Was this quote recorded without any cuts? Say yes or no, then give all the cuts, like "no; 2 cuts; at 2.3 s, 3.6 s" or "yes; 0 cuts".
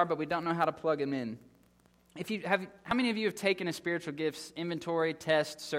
yes; 0 cuts